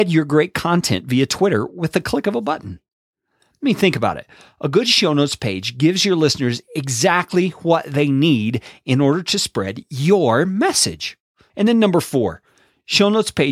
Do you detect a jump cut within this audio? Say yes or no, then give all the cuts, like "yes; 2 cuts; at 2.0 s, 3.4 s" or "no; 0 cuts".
yes; 1 cut; at 11.5 s